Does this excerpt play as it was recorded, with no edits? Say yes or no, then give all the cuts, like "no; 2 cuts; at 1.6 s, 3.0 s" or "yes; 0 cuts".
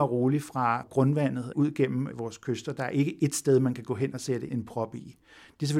yes; 0 cuts